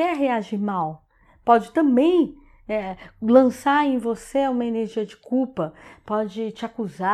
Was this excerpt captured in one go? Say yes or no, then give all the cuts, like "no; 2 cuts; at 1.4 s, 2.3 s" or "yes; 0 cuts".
yes; 0 cuts